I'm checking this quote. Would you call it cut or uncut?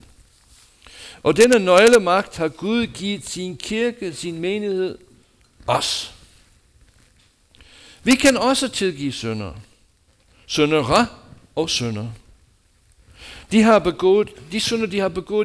uncut